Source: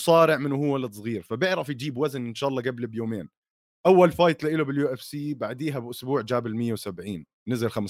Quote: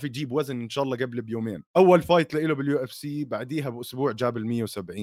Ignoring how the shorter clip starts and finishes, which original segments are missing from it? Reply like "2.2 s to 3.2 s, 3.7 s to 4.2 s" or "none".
3.3 s to 3.8 s